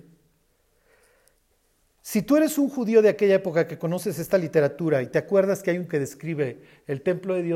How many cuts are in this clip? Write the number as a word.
one